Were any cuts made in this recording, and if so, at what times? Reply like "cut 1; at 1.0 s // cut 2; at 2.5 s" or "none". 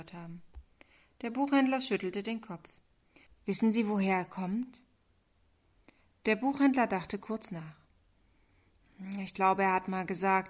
cut 1; at 3.3 s